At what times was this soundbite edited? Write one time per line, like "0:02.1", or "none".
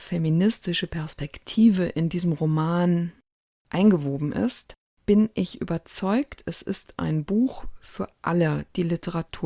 none